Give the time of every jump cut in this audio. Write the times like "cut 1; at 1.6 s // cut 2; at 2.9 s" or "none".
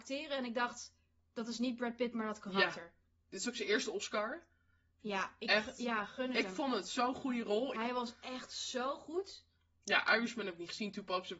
cut 1; at 7.7 s

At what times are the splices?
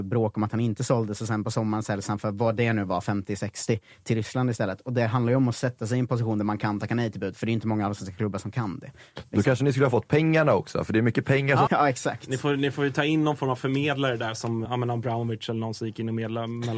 cut 1; at 11.7 s // cut 2; at 14.6 s

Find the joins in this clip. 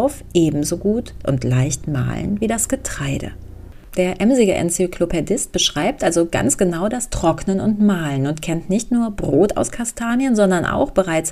cut 1; at 3.9 s

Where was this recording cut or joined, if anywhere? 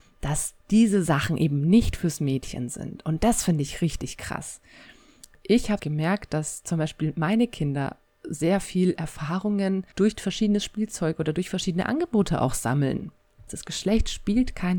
cut 1; at 5.8 s // cut 2; at 13.5 s

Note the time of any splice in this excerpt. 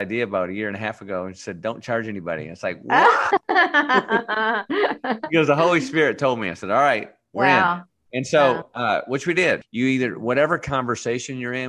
cut 1; at 9.6 s

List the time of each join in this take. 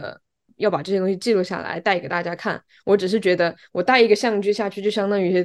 none

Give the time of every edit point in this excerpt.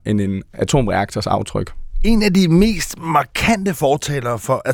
none

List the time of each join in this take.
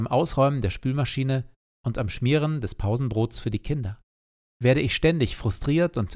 cut 1; at 4.4 s

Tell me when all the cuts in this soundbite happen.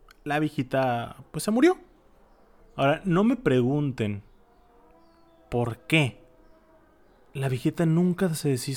cut 1; at 2.6 s

